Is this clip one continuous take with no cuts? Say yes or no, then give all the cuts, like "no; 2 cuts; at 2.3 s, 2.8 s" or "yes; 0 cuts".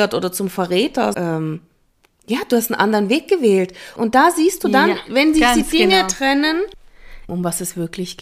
no; 3 cuts; at 1.1 s, 4.0 s, 7.3 s